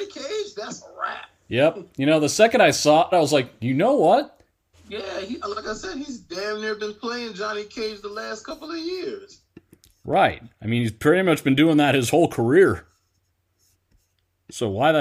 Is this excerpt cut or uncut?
cut